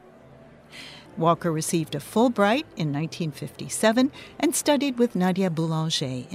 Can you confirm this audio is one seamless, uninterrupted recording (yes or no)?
no